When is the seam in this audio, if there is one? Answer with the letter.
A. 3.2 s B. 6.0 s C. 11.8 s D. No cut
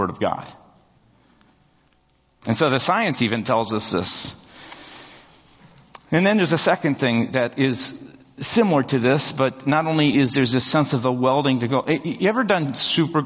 D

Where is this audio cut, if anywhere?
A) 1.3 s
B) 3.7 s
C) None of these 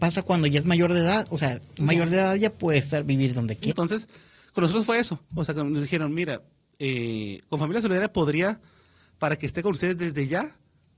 B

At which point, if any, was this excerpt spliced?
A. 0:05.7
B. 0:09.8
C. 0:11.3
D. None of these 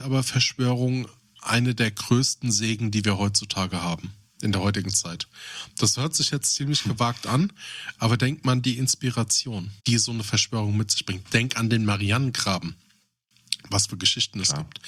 B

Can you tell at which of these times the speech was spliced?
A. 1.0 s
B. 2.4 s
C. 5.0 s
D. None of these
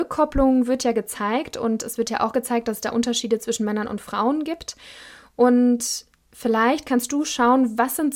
D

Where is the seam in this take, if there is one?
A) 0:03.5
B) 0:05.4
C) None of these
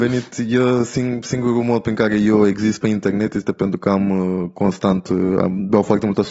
C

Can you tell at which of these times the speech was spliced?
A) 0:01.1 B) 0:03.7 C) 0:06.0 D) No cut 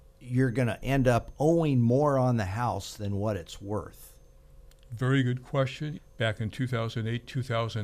C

